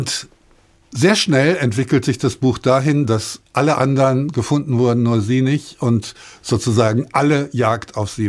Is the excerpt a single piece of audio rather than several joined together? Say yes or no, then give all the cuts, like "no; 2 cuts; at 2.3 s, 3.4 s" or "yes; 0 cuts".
yes; 0 cuts